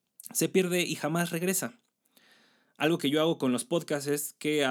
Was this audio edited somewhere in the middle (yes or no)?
no